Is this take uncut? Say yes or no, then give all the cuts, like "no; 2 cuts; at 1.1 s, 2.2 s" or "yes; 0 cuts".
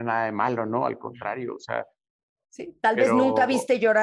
no; 1 cut; at 2.4 s